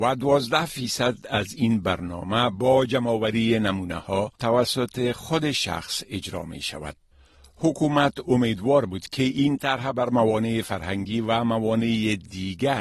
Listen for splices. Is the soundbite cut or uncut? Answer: cut